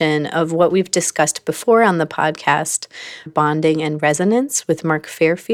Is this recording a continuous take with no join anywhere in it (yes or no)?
no